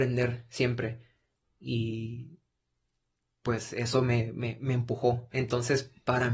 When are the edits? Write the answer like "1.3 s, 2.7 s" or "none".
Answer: 5.3 s